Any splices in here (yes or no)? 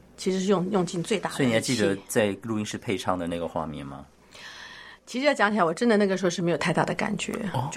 no